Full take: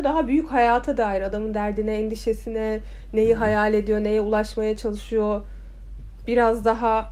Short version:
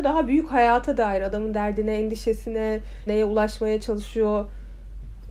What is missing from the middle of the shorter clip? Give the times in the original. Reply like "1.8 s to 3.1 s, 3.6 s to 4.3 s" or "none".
3.1 s to 4.0 s